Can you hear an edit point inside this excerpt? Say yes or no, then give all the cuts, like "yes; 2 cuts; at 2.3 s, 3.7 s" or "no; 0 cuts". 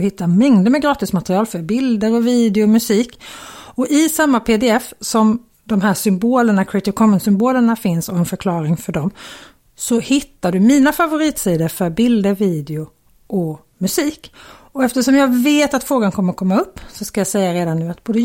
no; 0 cuts